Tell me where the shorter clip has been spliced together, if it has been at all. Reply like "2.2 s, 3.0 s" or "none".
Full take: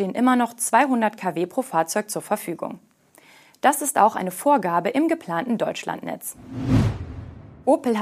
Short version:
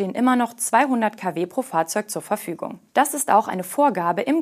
2.9 s